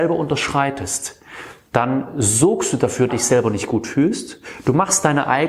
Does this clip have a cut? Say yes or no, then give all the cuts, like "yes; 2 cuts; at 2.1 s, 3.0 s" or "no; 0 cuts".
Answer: yes; 1 cut; at 3.1 s